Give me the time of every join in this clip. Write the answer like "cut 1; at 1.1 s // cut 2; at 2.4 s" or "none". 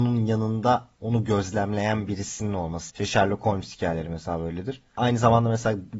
cut 1; at 2.9 s